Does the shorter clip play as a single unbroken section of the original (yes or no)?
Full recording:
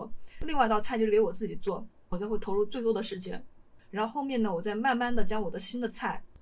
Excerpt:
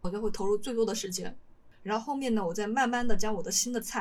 yes